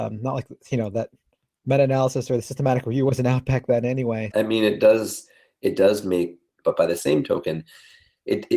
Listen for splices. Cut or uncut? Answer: cut